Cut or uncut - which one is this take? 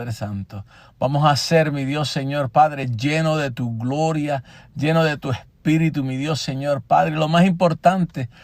uncut